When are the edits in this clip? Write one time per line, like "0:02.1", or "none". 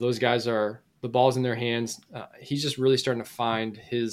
0:02.1